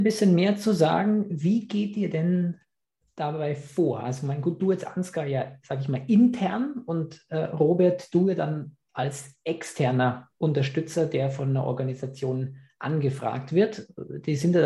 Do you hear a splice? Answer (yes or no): no